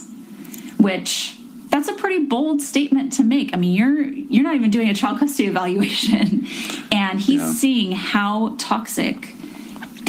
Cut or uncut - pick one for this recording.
uncut